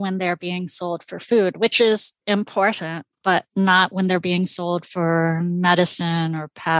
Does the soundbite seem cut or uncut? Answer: uncut